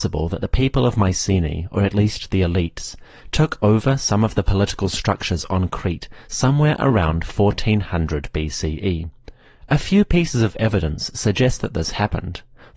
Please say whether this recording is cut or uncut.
uncut